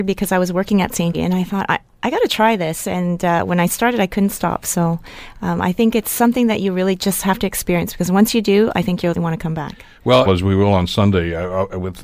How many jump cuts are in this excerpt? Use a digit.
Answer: 3